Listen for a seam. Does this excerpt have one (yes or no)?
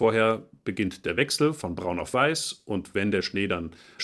no